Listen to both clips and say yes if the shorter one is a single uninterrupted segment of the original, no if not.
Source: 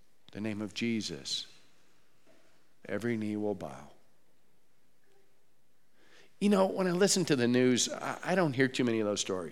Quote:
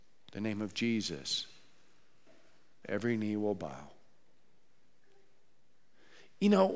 yes